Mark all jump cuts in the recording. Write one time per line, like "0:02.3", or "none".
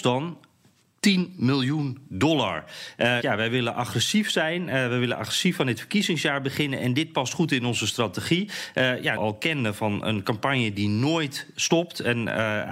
0:03.2
0:09.2